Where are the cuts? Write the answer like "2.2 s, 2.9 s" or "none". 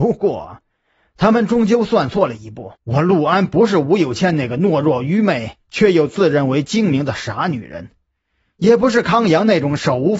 2.8 s